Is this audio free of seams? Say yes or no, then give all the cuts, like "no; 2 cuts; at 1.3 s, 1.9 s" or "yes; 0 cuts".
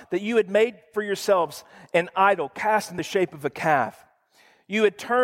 yes; 0 cuts